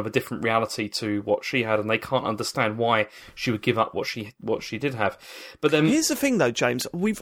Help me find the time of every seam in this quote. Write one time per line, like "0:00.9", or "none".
none